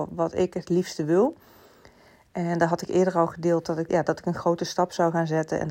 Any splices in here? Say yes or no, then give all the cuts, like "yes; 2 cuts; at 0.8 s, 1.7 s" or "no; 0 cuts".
yes; 1 cut; at 3.9 s